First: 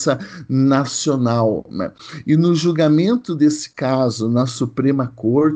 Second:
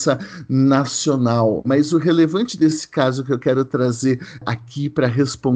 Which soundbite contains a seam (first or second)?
second